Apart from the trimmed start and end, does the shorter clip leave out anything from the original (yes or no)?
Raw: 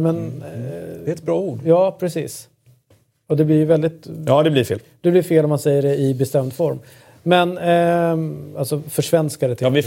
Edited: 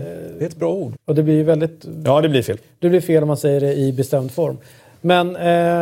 yes